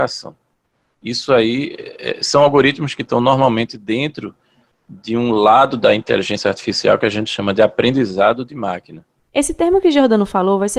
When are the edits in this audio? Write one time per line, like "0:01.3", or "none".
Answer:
none